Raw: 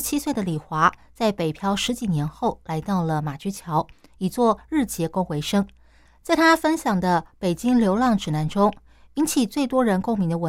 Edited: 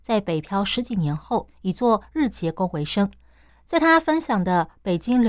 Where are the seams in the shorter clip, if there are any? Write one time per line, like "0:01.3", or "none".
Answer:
0:01.5

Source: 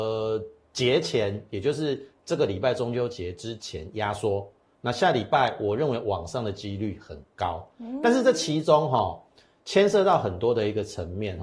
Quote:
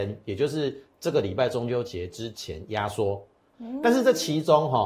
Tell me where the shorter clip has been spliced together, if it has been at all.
0:03.5

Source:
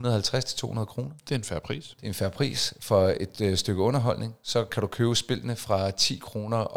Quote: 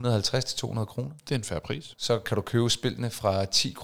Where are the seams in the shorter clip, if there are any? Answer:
0:01.9

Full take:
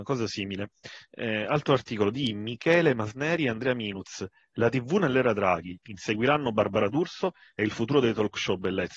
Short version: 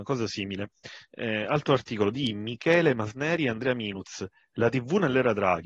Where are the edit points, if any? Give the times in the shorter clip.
none

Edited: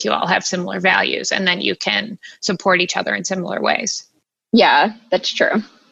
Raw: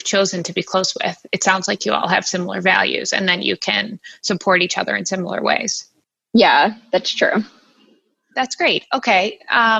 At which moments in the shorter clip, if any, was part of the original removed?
none

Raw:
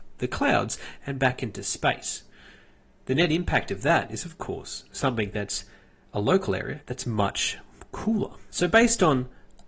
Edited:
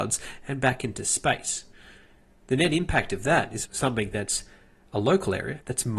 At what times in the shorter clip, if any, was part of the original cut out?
0:03.6

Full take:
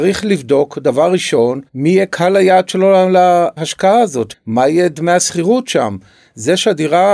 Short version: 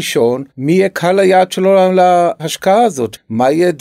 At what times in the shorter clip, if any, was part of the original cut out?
none

